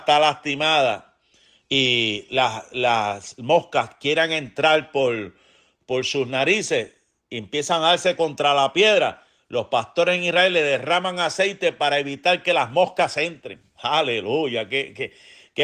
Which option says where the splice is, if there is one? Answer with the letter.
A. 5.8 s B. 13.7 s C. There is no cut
C